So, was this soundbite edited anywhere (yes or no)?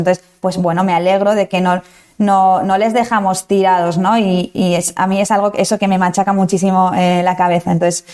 no